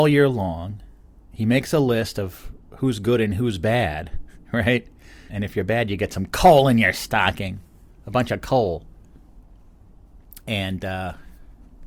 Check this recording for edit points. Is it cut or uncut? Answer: cut